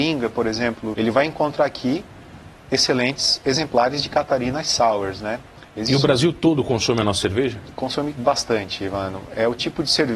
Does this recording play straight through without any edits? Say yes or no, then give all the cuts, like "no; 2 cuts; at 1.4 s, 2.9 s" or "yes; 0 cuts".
no; 1 cut; at 0.9 s